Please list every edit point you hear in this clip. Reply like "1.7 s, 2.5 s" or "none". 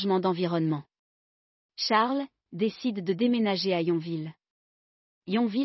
2.5 s